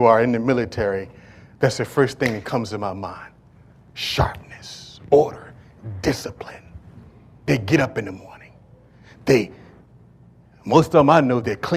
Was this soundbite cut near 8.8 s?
no; 0 cuts

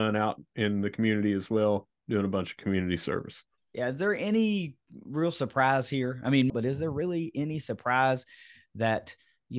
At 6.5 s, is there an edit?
yes; 1 cut; at 6.5 s

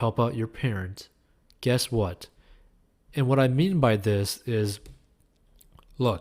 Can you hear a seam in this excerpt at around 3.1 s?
yes; 1 cut; at 3.1 s

